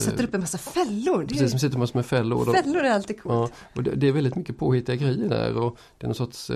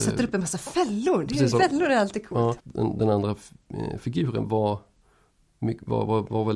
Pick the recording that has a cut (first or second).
second